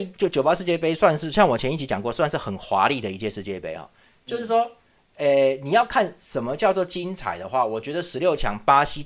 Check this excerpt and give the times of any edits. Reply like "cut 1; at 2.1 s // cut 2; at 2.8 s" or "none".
none